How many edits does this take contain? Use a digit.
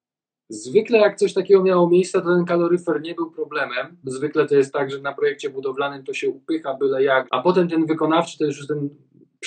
2